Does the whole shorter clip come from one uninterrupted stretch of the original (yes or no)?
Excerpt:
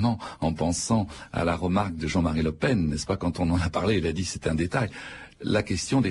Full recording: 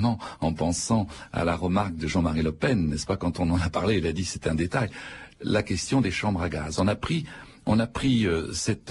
yes